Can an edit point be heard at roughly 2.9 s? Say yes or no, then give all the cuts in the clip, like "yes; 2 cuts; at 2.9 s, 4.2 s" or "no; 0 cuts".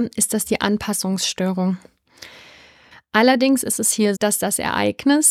yes; 2 cuts; at 2.9 s, 4.2 s